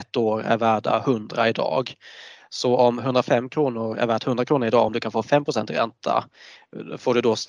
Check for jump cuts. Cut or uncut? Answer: uncut